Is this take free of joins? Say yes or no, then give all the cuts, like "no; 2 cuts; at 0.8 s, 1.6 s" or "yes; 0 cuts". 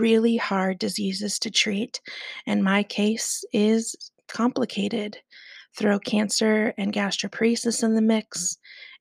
yes; 0 cuts